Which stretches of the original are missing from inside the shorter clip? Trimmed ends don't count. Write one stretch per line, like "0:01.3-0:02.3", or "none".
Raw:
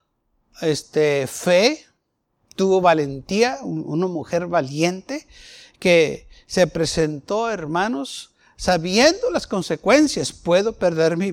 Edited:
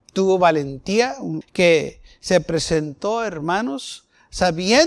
0:03.8-0:05.7